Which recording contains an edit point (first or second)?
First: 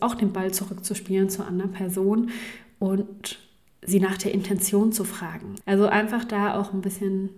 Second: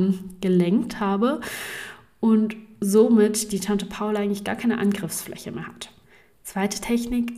first